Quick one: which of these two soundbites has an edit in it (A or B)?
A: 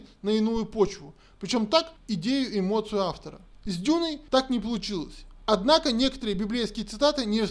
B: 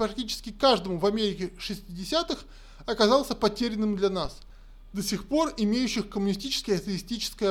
A